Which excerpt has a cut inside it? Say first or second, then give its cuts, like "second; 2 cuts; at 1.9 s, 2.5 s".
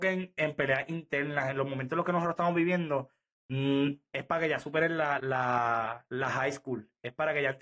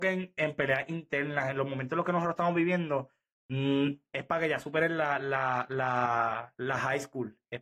first; 1 cut; at 5.2 s